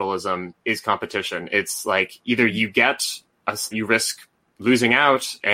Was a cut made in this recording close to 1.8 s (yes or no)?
no